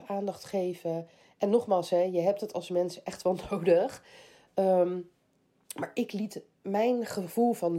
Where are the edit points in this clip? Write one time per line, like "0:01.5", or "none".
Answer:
none